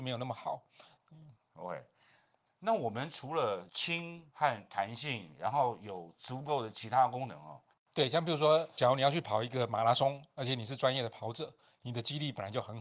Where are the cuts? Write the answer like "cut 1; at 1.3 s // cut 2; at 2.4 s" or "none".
cut 1; at 1.0 s // cut 2; at 7.8 s